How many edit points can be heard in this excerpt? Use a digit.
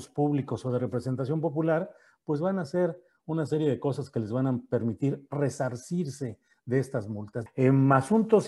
1